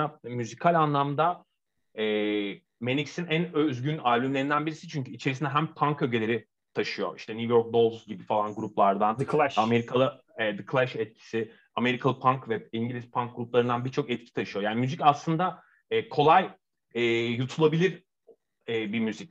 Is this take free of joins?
yes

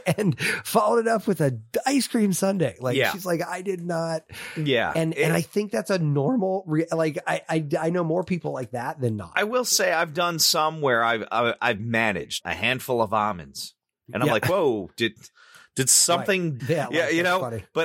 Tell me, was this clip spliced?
yes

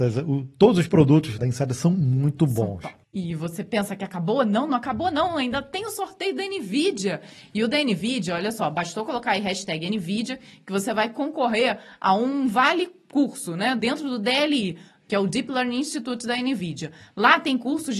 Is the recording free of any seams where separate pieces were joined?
no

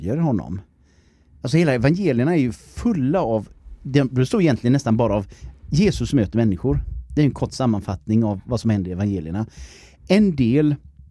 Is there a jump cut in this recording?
no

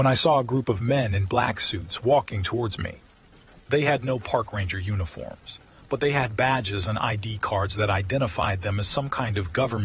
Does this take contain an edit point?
no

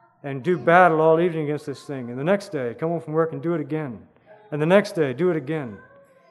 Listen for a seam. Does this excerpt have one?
no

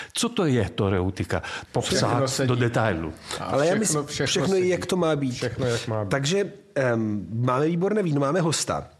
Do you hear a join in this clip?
yes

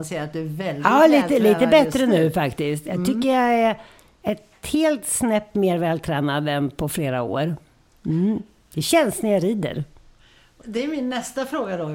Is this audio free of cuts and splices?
no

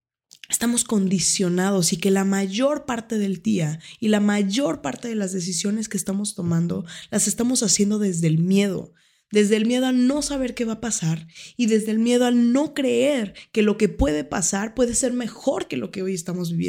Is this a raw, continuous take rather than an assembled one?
yes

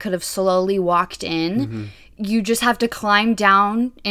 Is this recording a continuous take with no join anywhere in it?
yes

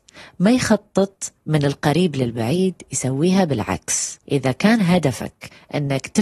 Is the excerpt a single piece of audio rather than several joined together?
no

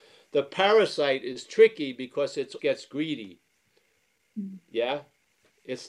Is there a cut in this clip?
yes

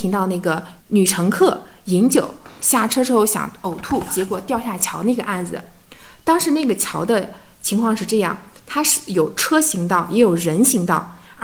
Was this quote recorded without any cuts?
yes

